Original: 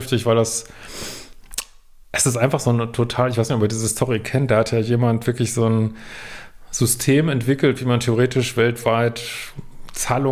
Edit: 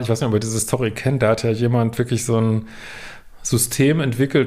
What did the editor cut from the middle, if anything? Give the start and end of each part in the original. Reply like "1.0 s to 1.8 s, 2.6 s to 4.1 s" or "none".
none